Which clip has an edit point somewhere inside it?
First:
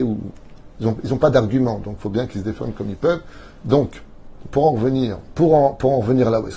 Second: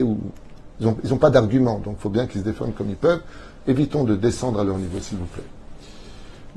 first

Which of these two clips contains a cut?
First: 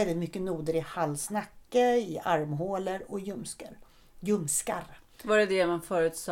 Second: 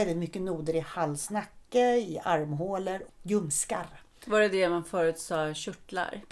second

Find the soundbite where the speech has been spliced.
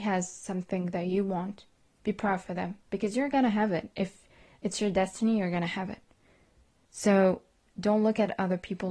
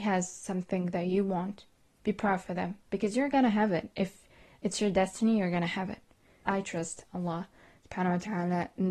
second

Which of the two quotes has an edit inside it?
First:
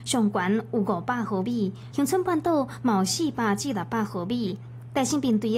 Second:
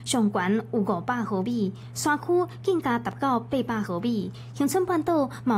first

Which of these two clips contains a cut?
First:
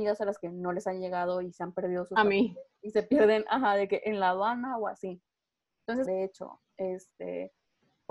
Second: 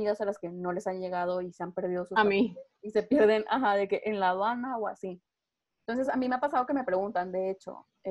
first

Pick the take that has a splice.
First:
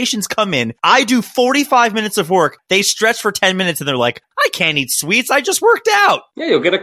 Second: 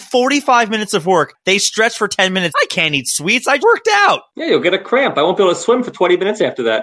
second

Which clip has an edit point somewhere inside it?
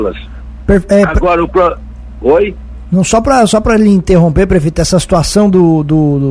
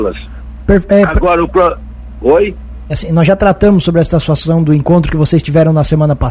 second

